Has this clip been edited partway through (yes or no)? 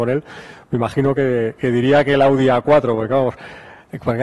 no